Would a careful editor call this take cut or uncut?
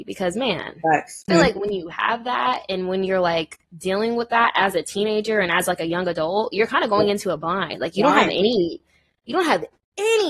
cut